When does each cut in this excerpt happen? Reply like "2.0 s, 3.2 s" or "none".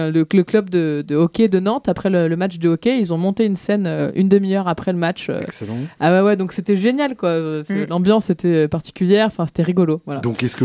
none